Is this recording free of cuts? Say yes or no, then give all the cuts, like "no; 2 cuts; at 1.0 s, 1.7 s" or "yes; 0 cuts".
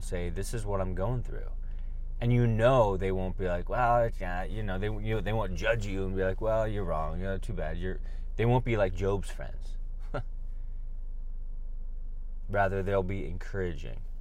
yes; 0 cuts